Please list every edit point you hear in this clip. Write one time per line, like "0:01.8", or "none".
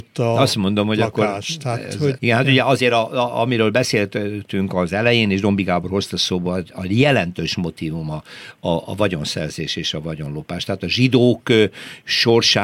0:02.2

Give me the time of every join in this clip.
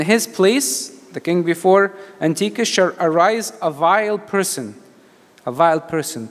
none

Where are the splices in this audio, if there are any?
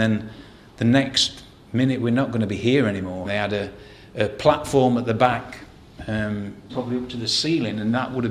0:03.3
0:06.7

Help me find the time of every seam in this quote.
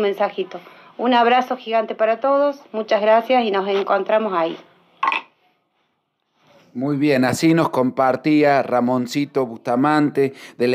none

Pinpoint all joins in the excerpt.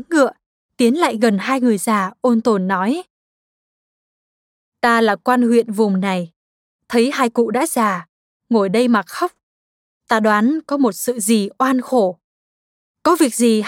none

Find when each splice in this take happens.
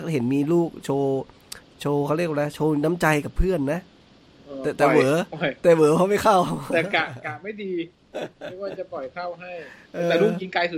none

